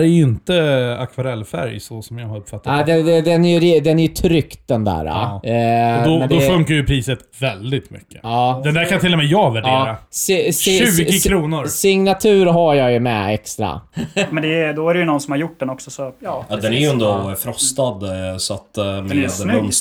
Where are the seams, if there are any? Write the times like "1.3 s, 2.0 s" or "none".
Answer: 13.9 s